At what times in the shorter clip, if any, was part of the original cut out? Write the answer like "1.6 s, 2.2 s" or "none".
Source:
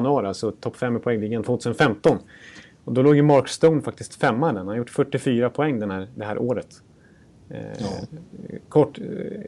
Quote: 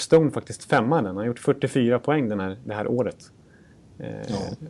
none